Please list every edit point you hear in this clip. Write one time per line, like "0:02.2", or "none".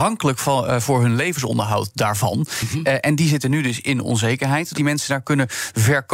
0:04.7